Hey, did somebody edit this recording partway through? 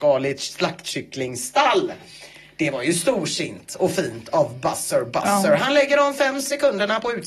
no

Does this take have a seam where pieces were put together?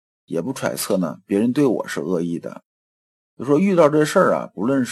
yes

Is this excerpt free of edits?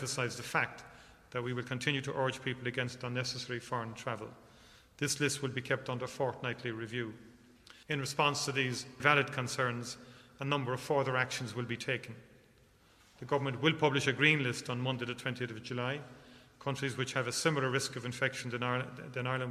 no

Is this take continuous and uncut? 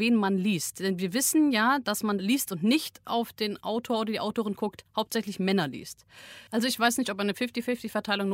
no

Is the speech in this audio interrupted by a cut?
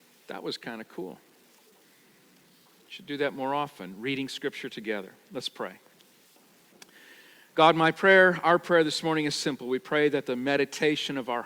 no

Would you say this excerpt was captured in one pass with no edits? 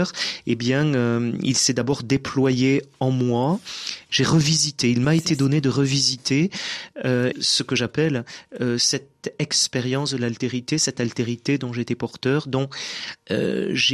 no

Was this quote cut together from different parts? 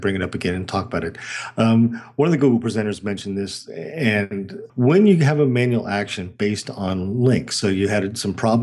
yes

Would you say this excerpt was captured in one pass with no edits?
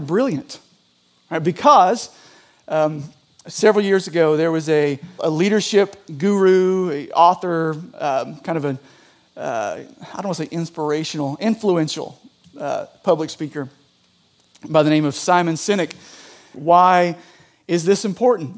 no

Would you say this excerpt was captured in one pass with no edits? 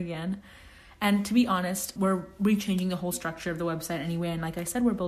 no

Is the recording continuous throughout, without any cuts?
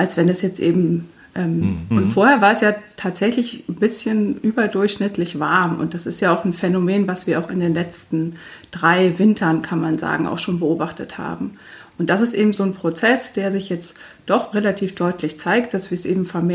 no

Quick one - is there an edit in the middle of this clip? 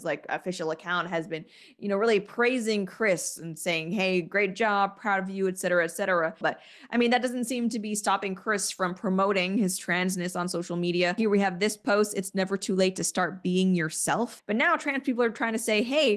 yes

